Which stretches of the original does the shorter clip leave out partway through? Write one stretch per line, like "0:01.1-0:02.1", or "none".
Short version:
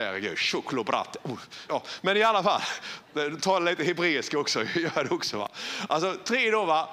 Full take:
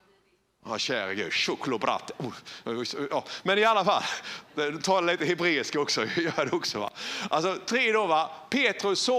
0:02.6-0:03.1